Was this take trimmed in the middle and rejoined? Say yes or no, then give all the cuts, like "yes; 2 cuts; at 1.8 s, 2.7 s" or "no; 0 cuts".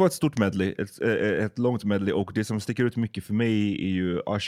no; 0 cuts